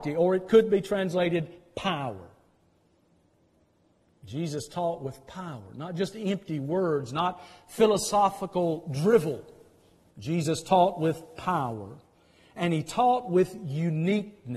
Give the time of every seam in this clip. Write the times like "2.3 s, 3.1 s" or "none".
none